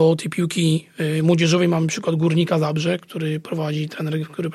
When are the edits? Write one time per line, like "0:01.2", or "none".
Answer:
none